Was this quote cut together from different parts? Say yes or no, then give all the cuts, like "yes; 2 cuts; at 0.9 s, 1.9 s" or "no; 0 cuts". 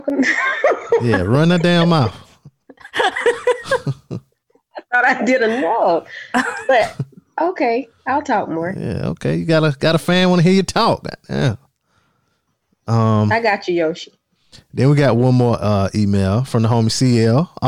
no; 0 cuts